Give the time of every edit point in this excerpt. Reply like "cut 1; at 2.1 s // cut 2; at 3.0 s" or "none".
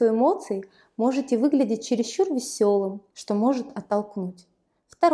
cut 1; at 3.1 s